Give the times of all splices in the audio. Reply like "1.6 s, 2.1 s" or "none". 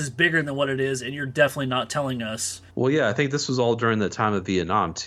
2.7 s

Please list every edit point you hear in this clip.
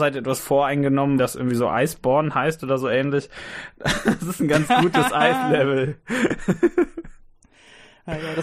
1.2 s

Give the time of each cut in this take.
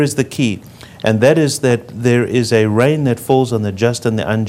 none

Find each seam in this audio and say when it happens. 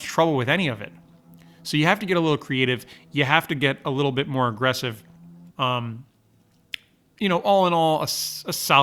5.5 s

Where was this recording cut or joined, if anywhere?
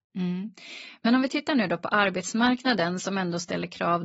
none

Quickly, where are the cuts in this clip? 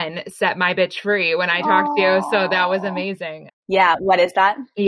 3.5 s

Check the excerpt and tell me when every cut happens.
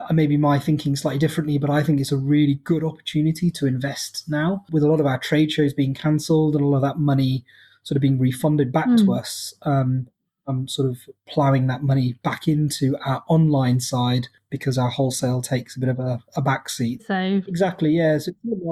17.0 s

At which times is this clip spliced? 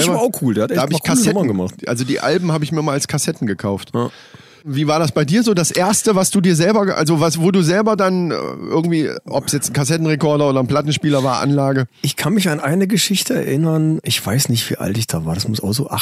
none

